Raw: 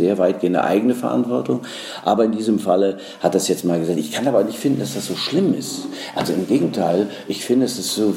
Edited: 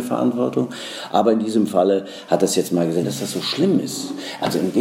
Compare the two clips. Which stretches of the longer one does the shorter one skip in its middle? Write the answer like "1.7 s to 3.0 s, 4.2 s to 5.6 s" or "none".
3.9 s to 4.8 s